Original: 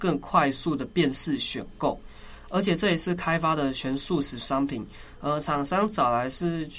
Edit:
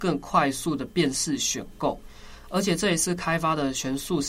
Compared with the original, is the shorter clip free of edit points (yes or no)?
yes